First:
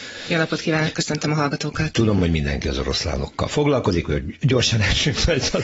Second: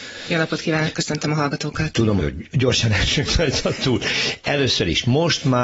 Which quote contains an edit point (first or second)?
second